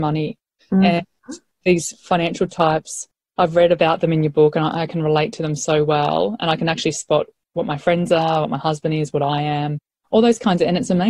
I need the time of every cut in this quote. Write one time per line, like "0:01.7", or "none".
none